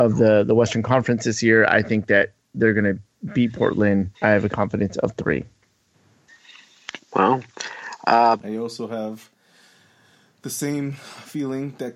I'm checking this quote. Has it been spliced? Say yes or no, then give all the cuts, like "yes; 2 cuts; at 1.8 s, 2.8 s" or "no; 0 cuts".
yes; 2 cuts; at 4.1 s, 8.4 s